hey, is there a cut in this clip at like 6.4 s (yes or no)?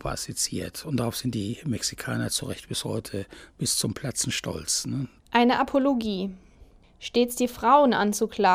no